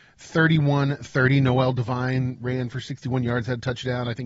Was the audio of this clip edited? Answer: no; 0 cuts

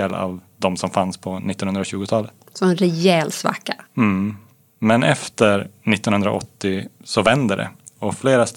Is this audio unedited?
yes; 0 cuts

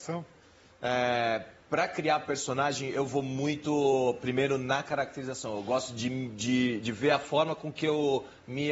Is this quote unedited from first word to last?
yes; 0 cuts

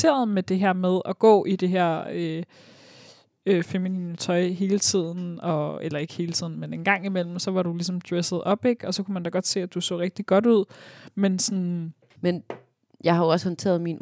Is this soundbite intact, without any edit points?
no; 2 cuts; at 3.6 s, 12.2 s

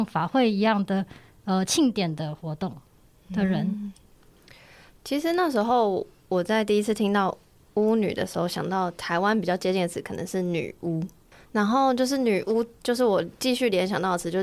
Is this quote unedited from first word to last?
yes; 0 cuts

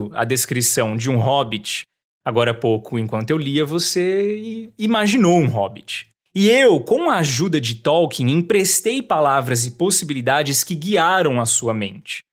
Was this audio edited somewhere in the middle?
yes; 1 cut; at 6.2 s

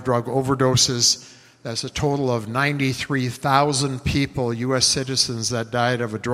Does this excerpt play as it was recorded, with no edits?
yes; 0 cuts

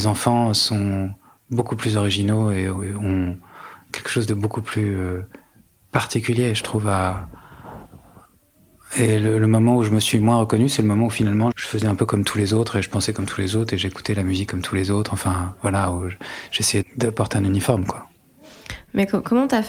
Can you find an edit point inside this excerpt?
yes; 2 cuts; at 11.5 s, 16.8 s

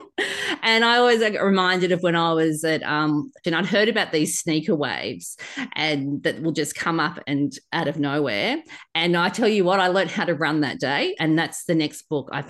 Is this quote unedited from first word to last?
no; 2 cuts; at 3.4 s, 11.2 s

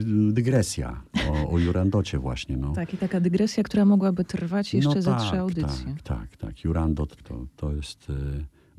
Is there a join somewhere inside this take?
yes; 1 cut; at 7.2 s

